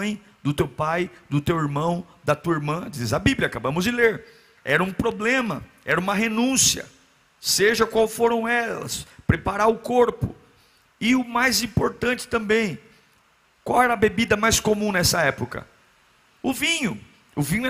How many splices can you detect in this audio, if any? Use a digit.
1